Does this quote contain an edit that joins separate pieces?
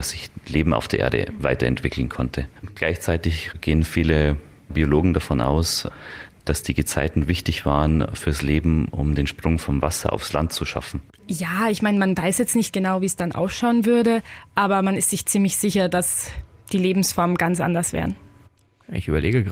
yes; 1 cut; at 11.2 s

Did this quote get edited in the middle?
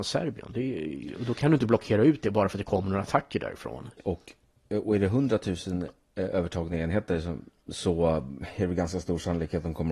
yes; 1 cut; at 4.0 s

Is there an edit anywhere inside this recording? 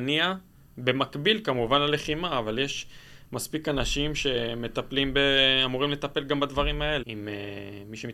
yes; 1 cut; at 7.0 s

